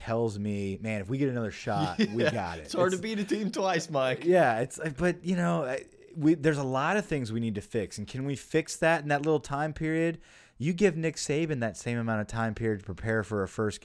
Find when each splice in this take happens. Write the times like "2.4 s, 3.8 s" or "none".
none

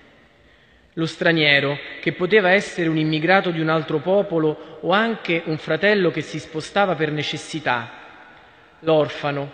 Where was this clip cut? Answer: none

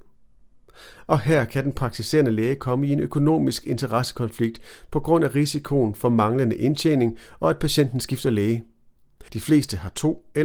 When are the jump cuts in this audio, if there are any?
9.3 s

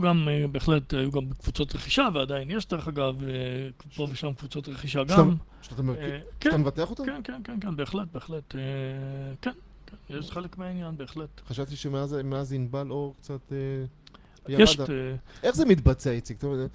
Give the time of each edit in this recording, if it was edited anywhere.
14.8 s

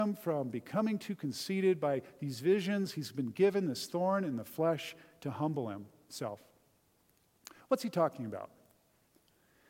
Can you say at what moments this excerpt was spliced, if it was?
none

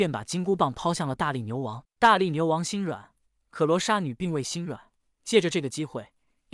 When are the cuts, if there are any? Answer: 1.9 s

